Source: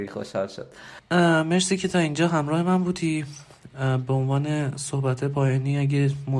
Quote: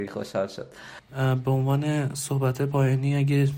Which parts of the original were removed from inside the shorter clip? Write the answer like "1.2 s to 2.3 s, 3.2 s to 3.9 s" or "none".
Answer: 1.1 s to 3.7 s